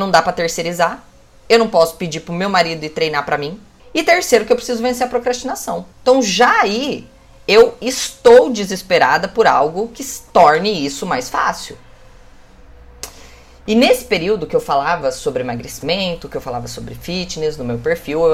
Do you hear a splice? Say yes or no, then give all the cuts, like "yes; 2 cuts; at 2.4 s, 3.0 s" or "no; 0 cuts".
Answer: yes; 2 cuts; at 3.8 s, 5.9 s